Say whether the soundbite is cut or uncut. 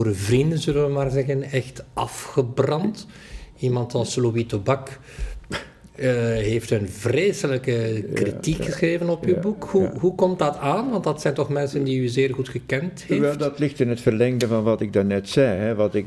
uncut